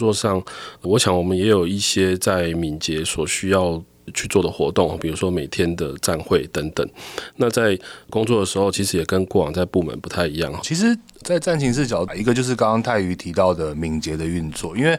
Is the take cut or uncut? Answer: cut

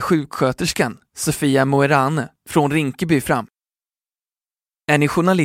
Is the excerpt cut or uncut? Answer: uncut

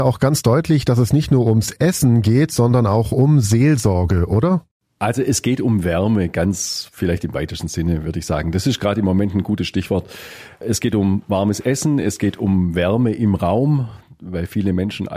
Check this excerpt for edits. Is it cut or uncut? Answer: uncut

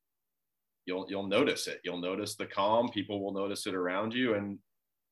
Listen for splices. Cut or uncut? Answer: uncut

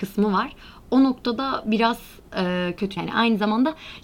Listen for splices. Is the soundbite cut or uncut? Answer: cut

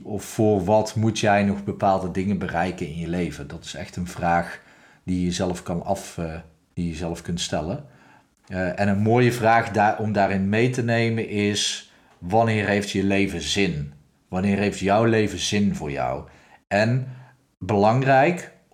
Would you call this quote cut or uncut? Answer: cut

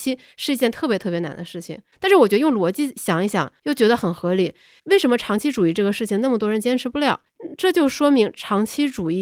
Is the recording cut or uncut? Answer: uncut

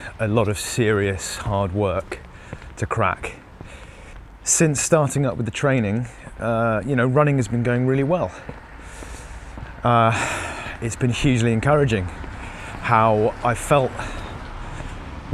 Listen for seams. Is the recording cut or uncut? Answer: uncut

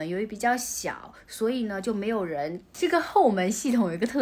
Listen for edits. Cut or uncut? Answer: cut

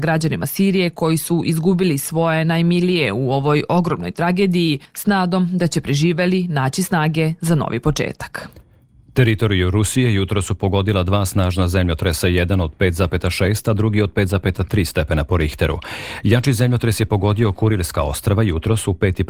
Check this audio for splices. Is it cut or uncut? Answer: uncut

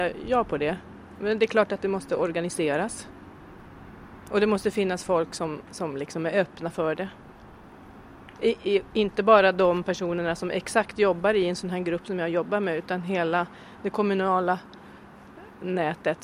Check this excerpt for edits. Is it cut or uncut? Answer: uncut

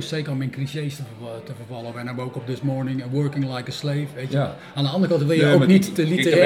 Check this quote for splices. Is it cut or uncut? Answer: uncut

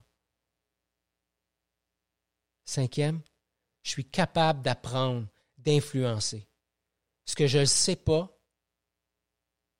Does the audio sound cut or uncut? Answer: uncut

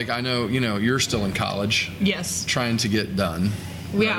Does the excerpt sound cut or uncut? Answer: uncut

